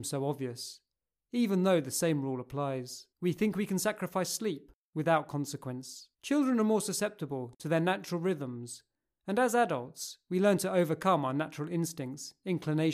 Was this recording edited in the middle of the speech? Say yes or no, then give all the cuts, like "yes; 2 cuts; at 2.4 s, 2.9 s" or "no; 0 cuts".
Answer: yes; 2 cuts; at 3.1 s, 6.1 s